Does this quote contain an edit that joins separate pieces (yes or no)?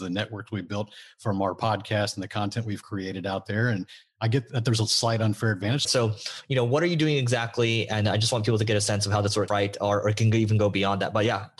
yes